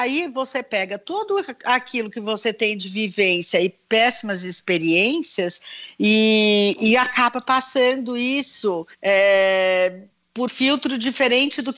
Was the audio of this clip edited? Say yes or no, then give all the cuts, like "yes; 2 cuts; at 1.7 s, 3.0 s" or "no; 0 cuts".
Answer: yes; 2 cuts; at 8.9 s, 10.5 s